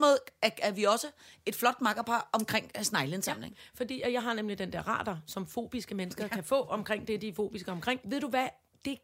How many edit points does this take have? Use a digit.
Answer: 1